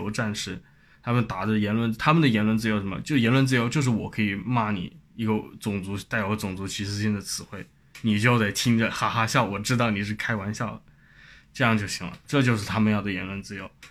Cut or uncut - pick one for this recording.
cut